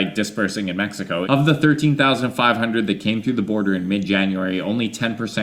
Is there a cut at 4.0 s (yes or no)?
no